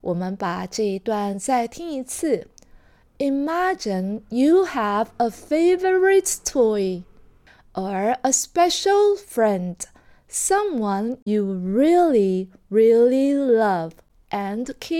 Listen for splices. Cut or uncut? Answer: uncut